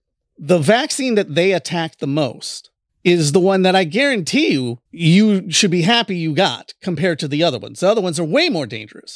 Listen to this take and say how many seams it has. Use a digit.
2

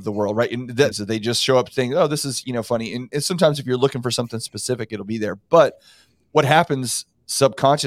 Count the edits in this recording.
1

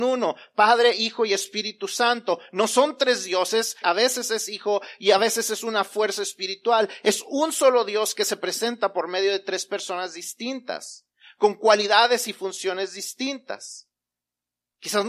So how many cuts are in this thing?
1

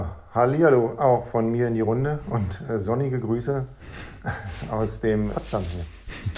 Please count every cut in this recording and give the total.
1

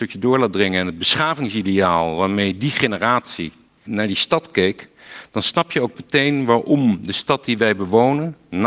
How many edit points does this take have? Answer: 1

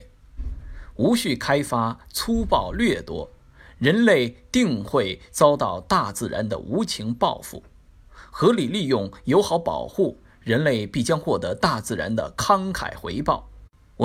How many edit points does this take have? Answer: 0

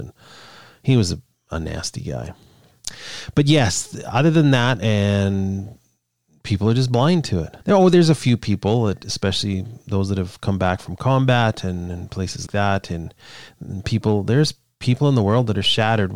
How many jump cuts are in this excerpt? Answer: 3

